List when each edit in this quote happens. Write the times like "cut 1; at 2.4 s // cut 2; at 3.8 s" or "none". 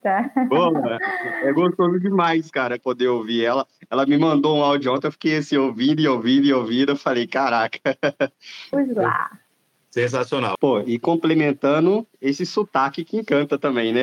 cut 1; at 2.8 s // cut 2; at 8.7 s // cut 3; at 10.5 s